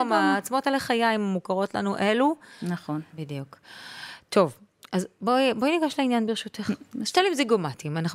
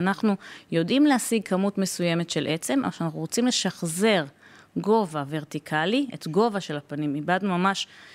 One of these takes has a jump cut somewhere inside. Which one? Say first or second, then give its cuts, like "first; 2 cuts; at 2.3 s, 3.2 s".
first; 1 cut; at 3.1 s